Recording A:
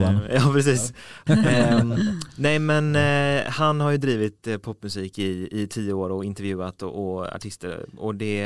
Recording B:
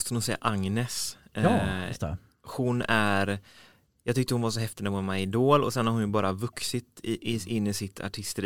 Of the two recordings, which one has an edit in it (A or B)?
A